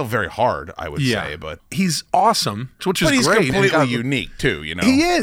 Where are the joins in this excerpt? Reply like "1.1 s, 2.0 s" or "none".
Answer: 1.6 s, 2.8 s